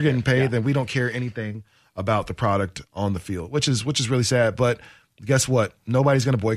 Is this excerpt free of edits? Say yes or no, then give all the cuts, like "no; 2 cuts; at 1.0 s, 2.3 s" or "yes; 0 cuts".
yes; 0 cuts